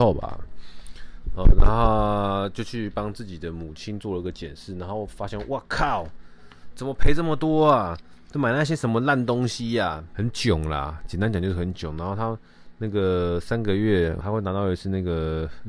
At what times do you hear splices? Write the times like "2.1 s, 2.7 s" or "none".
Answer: 10.1 s, 14.2 s